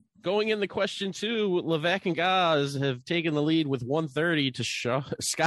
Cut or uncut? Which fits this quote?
uncut